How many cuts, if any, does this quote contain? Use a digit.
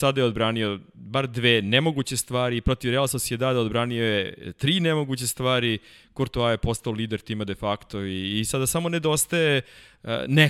0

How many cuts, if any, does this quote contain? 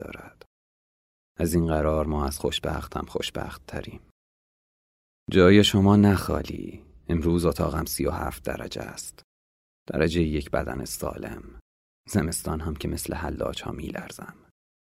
1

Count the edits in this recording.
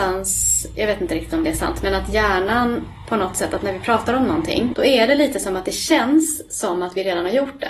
1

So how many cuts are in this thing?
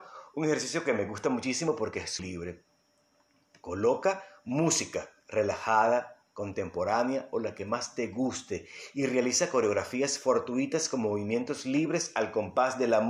2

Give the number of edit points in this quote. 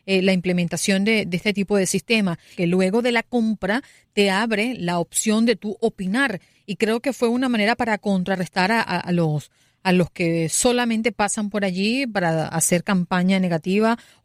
1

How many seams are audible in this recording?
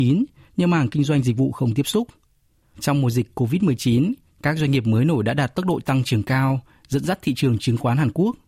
1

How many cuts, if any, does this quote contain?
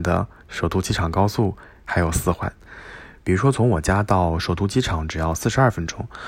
1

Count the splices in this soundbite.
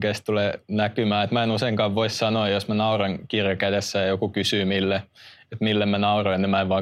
0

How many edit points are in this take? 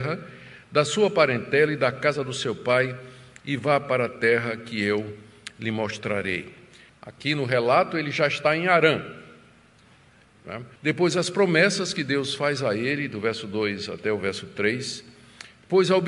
2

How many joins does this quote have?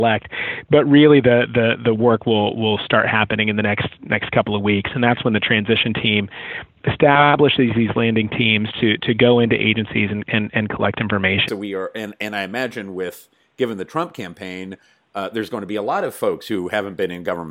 1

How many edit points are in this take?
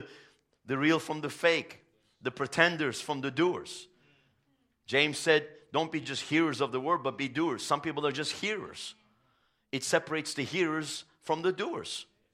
0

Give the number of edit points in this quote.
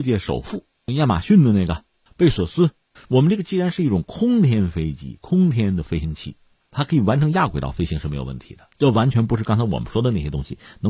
2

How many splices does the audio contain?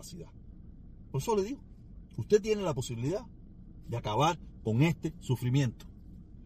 0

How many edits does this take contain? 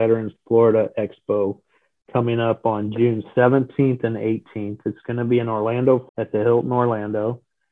1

